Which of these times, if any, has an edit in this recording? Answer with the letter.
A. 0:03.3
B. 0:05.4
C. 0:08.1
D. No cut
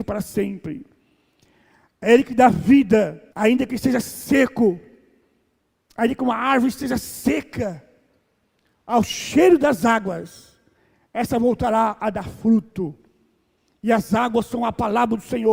A